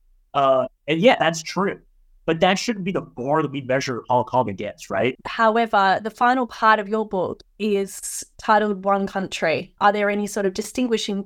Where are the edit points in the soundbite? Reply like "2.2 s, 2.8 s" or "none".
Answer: 5.2 s, 9.8 s